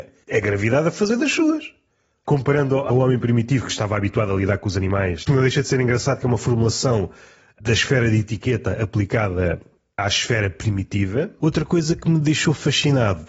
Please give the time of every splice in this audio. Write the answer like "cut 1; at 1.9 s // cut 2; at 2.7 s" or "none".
cut 1; at 2.3 s // cut 2; at 5.3 s